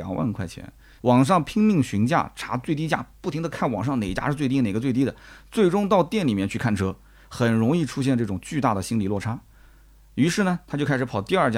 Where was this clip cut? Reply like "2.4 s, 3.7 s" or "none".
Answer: 1.0 s